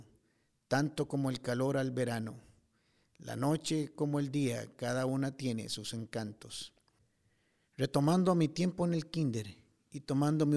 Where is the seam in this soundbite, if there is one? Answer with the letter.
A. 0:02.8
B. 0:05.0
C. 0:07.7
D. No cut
D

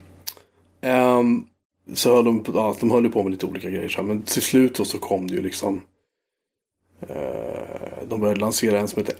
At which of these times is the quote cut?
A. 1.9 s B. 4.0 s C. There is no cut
A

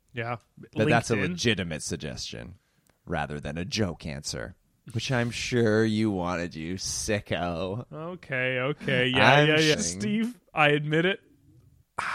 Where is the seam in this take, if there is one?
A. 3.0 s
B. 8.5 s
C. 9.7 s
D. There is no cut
C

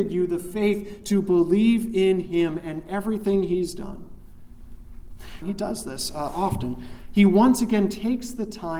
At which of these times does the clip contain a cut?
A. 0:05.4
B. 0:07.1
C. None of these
A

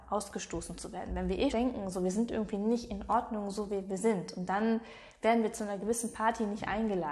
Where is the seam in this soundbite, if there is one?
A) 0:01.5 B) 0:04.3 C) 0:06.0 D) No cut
A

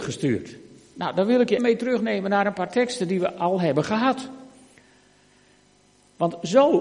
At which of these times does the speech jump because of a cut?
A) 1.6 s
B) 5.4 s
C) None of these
A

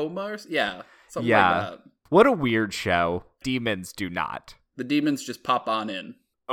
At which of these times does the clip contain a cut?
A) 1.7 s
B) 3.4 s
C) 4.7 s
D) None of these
B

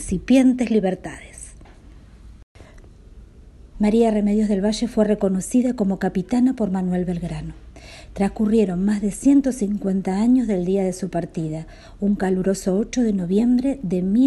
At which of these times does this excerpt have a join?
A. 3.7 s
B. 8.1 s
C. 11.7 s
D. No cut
A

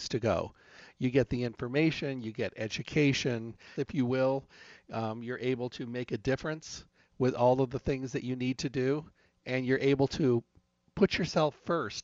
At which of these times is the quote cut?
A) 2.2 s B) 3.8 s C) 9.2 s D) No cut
B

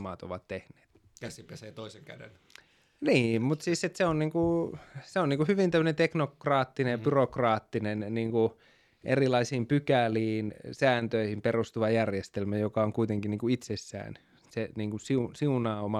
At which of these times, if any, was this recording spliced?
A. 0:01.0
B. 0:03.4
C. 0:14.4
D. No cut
C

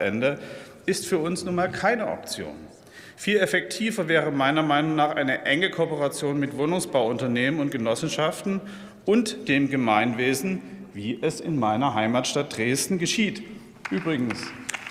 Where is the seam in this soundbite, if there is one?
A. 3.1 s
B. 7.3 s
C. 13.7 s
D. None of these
D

